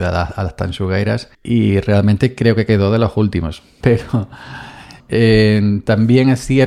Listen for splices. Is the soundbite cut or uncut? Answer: cut